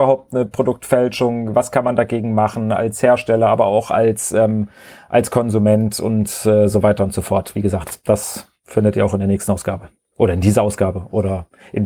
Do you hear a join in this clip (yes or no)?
no